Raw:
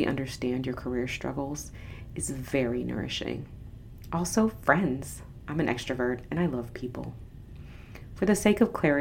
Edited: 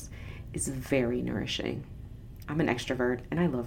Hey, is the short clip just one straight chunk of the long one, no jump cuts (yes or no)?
no